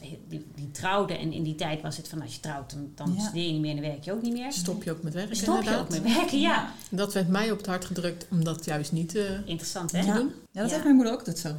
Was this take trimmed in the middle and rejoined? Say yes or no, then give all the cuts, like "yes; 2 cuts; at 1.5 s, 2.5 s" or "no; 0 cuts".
yes; 1 cut; at 10.5 s